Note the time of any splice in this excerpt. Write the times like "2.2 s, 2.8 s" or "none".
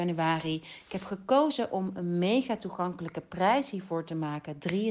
none